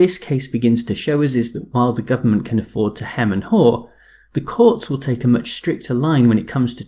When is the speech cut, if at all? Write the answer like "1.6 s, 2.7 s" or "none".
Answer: none

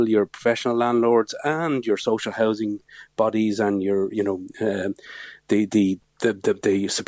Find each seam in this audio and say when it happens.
6.0 s

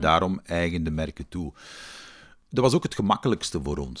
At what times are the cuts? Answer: none

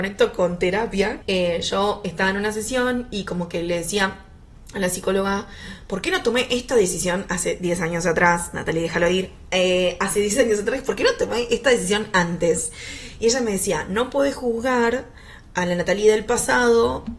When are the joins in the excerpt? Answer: 1.2 s

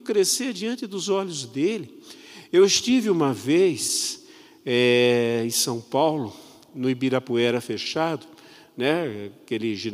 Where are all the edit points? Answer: none

